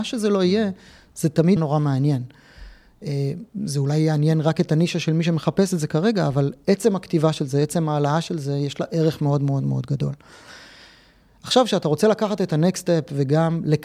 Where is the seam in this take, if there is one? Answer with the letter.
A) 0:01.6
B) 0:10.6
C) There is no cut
A